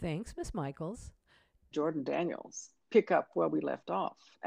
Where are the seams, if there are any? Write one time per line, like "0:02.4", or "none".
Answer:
0:01.7